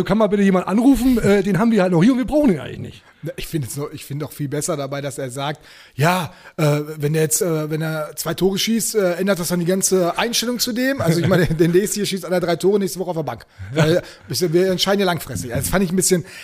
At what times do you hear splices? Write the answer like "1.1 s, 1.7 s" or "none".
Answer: none